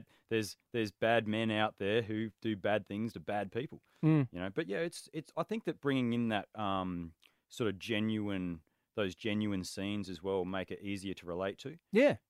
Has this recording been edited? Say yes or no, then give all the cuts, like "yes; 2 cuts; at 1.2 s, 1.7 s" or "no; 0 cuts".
no; 0 cuts